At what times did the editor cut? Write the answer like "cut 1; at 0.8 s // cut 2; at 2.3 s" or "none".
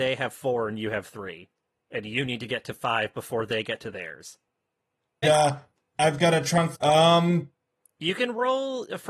cut 1; at 5.2 s // cut 2; at 6.7 s